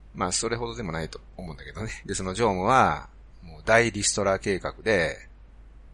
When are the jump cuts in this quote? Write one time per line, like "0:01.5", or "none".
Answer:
0:02.0